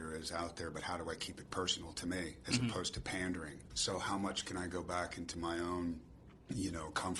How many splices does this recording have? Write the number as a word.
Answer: one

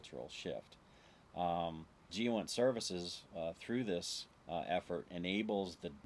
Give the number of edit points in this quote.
one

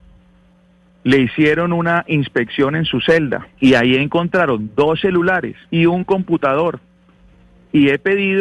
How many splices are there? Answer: two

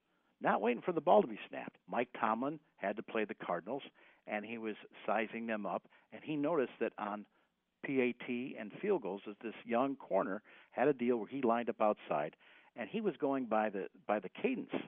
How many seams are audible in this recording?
one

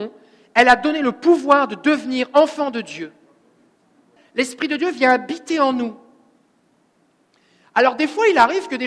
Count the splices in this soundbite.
one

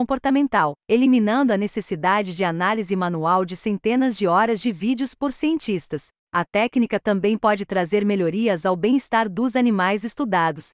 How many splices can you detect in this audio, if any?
one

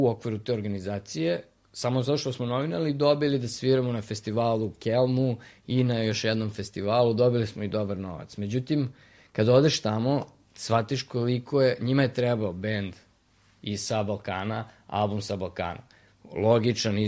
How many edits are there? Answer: zero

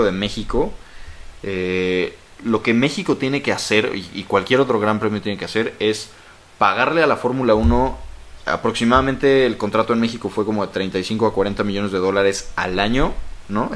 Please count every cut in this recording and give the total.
zero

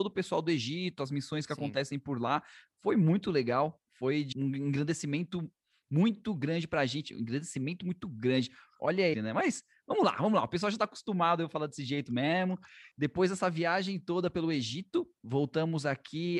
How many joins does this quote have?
three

